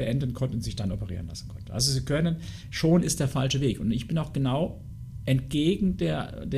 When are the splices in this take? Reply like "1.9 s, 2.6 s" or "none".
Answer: none